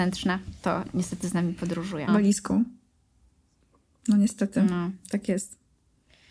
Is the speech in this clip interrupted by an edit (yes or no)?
yes